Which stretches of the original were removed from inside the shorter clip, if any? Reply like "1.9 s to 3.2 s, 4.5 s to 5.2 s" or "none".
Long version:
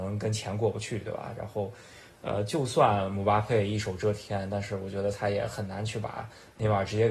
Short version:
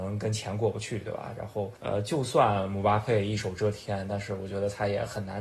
1.8 s to 2.2 s